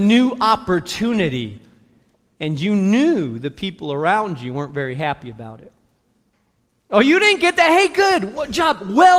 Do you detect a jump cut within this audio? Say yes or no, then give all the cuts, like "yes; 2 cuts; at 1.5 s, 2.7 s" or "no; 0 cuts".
no; 0 cuts